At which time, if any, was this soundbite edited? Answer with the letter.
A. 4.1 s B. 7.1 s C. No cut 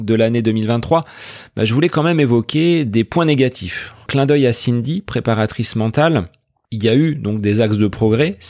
A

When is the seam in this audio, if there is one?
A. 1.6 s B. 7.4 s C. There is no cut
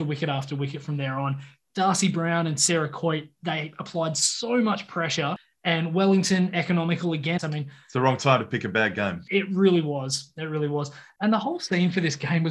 B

